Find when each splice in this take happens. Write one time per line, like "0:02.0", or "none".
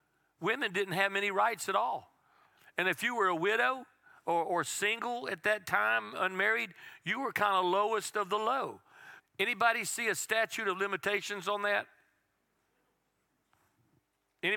0:09.2